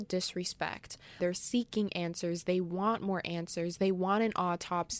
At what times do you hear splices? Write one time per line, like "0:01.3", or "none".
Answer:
0:01.2